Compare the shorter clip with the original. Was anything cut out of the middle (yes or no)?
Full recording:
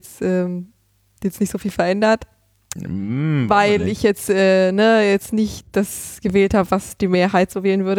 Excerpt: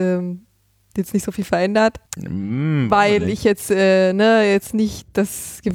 yes